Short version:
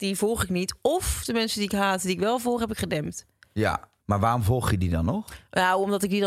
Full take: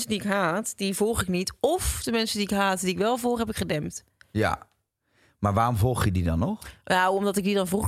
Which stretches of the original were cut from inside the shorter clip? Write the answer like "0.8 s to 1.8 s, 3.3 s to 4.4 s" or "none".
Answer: 4.8 s to 5.3 s